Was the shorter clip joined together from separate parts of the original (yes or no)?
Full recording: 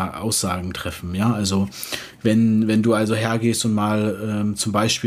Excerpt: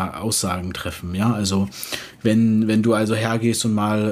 no